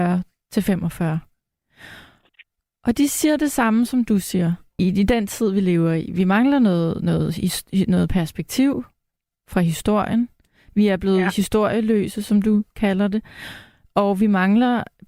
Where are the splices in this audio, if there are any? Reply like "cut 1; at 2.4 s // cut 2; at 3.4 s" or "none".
cut 1; at 4.8 s